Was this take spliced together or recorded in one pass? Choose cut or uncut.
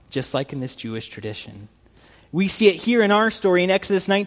uncut